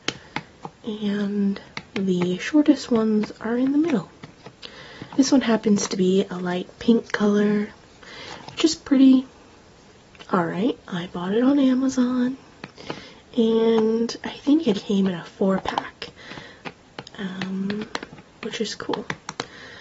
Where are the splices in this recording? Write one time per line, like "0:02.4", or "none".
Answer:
0:05.1
0:10.8
0:14.7